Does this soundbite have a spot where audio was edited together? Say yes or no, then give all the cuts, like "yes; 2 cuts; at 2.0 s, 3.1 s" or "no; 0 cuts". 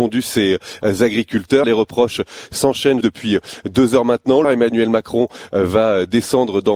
yes; 3 cuts; at 1.6 s, 3.0 s, 4.4 s